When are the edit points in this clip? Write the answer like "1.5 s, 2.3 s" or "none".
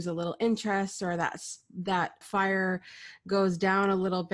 2.2 s